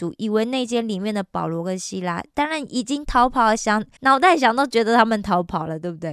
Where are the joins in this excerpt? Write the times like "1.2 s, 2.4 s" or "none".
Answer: 4.0 s